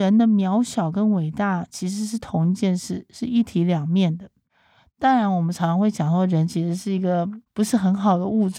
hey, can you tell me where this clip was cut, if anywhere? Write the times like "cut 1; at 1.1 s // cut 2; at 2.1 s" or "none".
none